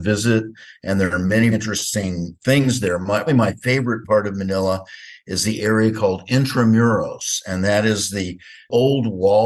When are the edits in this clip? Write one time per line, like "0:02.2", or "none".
0:01.5
0:03.3